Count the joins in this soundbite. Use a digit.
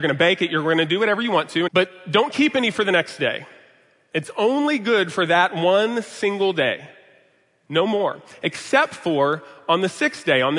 1